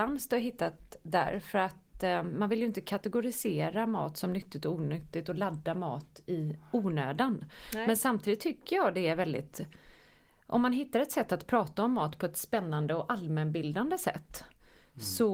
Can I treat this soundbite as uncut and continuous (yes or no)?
yes